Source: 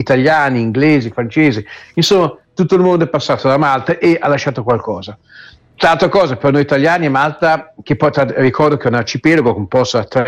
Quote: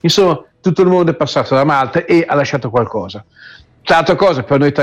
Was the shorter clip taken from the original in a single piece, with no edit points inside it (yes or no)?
yes